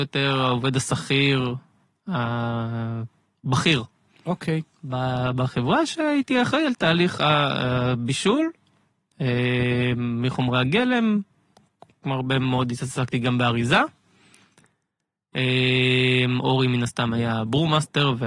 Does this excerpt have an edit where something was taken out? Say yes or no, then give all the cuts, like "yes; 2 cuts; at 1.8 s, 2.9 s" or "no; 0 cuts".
no; 0 cuts